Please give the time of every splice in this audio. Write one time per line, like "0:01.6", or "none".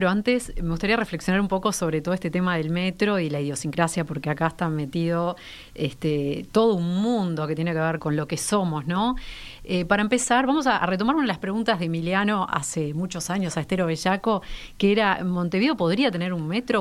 0:08.0